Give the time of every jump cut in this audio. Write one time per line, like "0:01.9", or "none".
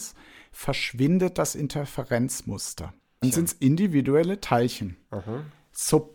0:03.2